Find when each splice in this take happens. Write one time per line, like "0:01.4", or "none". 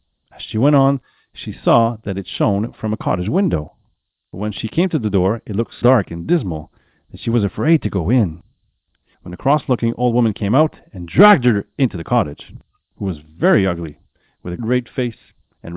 0:05.8
0:12.9
0:14.6

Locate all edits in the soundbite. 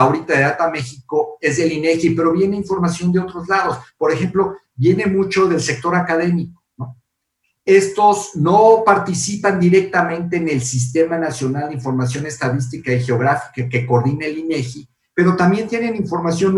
none

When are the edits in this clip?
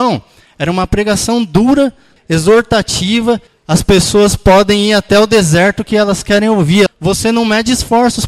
0:02.2
0:03.5
0:06.9

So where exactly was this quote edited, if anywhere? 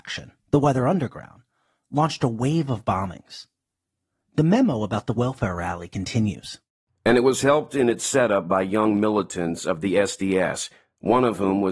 none

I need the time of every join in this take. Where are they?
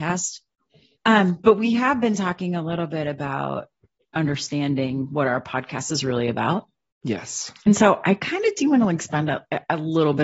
0:01.0

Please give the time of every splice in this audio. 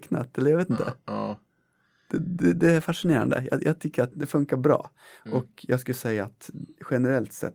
0:04.1

